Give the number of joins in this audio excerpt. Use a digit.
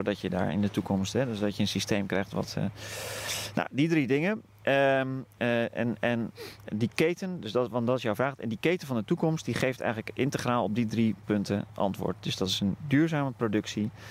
0